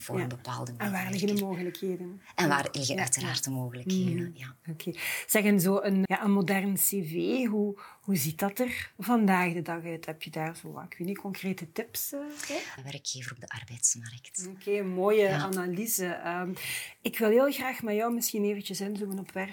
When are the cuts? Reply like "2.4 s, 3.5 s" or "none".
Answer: 6.1 s, 12.8 s